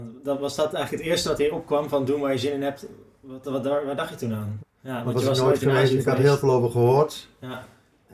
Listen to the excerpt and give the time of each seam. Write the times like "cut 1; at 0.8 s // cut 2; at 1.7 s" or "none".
cut 1; at 4.6 s